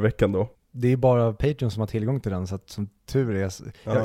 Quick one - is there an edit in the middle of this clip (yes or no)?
no